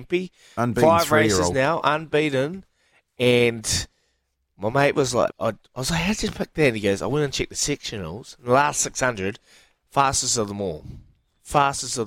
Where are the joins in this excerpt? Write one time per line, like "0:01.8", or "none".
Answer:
0:05.3